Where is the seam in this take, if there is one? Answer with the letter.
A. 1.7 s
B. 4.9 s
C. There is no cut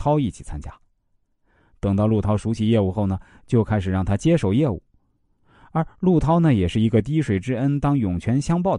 A